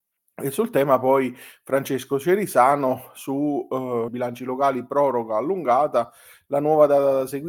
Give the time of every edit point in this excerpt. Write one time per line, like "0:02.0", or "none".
0:04.1

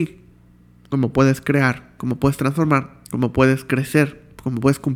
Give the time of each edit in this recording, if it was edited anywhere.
0:02.0
0:03.0

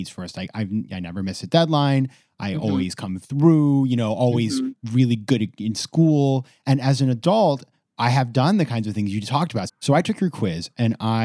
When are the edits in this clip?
0:09.7

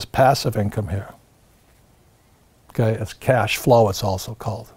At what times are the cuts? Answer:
none

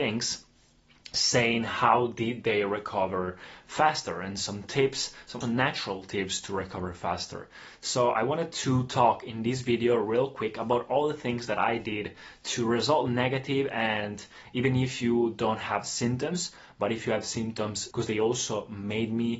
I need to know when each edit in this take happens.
0:05.4
0:17.9

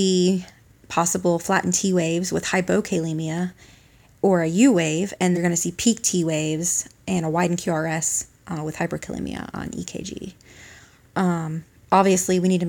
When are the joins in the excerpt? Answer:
0:05.3

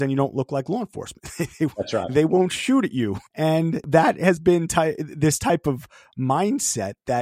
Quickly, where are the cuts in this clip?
0:03.3
0:04.4

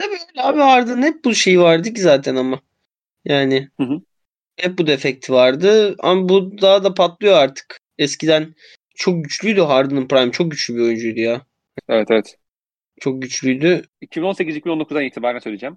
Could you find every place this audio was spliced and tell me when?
0:11.8
0:13.9

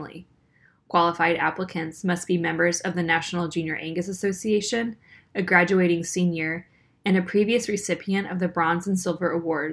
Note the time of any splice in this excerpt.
none

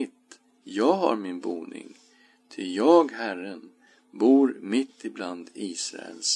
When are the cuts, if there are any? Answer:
none

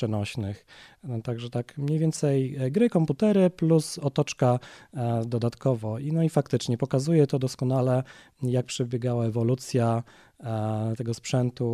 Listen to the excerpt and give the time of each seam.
none

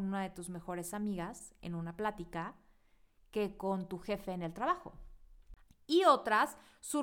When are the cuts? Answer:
0:05.7

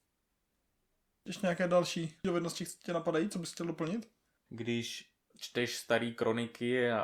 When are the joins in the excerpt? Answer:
0:04.5

